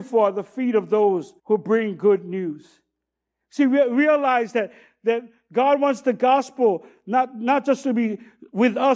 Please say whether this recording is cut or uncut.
cut